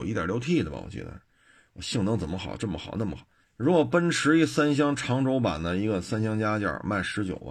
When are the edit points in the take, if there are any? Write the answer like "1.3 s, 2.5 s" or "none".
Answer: 3.4 s